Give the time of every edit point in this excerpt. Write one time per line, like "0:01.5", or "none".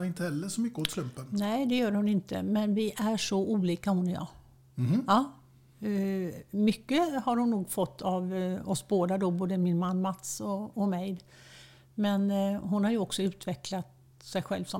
none